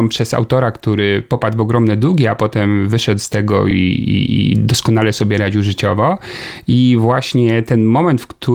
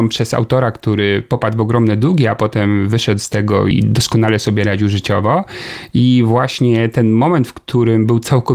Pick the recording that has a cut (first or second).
second